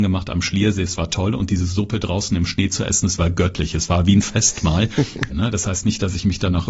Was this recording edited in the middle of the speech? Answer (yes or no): yes